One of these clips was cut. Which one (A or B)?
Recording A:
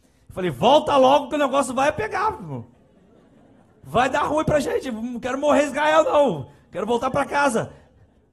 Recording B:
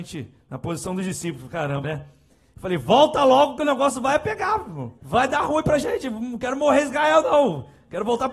B